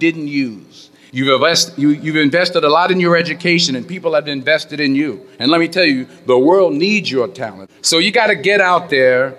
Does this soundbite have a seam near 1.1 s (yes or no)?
yes